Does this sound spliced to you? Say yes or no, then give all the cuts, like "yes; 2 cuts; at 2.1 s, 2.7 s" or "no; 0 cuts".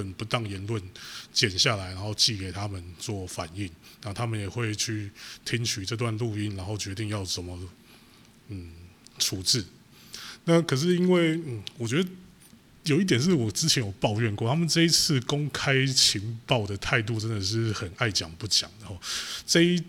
no; 0 cuts